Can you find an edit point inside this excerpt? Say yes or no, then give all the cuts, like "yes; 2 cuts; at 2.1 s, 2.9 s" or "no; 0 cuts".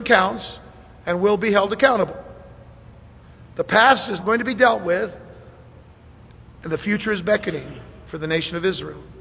yes; 1 cut; at 4.2 s